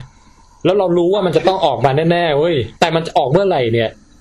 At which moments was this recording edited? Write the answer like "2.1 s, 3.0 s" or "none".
2.8 s